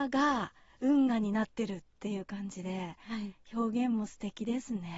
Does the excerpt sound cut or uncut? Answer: uncut